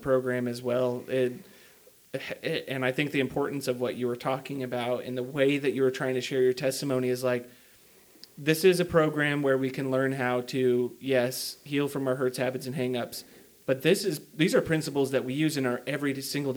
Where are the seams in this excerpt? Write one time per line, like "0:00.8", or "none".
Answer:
none